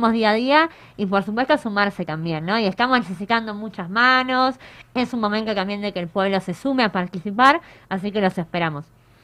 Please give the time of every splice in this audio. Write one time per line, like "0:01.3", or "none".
none